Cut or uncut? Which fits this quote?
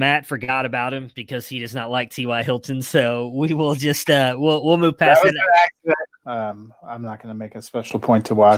cut